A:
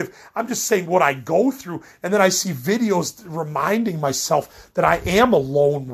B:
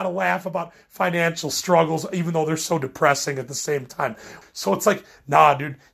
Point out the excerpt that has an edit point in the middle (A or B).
B